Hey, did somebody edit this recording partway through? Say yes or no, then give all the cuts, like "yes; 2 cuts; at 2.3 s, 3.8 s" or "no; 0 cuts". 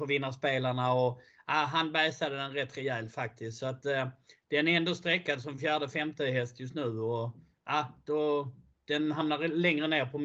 no; 0 cuts